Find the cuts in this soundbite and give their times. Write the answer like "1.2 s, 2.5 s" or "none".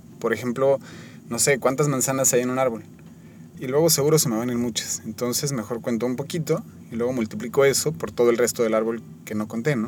3.5 s